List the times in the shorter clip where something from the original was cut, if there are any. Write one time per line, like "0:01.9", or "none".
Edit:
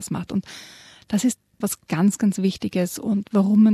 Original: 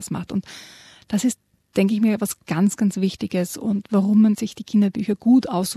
0:01.6